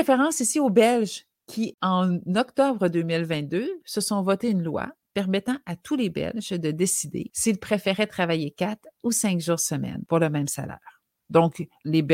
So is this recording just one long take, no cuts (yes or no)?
yes